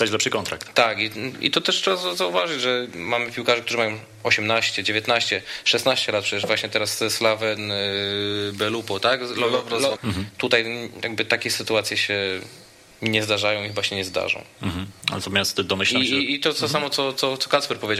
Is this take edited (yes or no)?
yes